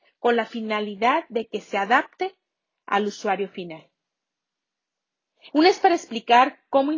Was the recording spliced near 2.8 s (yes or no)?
no